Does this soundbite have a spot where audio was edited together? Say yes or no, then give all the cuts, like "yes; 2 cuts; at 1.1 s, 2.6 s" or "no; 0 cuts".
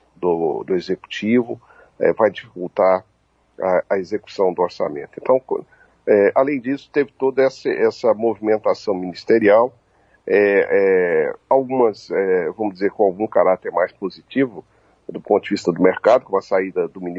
no; 0 cuts